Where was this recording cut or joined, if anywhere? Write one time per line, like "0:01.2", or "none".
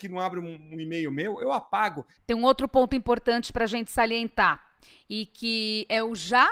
0:02.2